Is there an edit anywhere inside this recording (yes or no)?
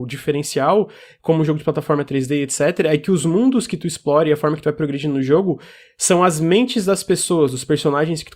no